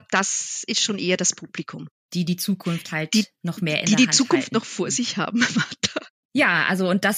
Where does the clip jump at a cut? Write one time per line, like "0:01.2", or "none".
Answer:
none